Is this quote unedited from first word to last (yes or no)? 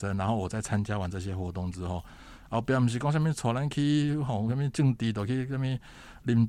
yes